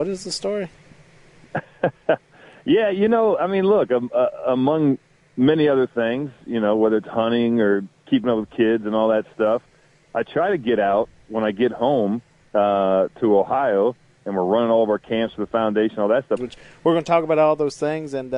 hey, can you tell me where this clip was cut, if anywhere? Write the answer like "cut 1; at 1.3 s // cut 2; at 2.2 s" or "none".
cut 1; at 16.4 s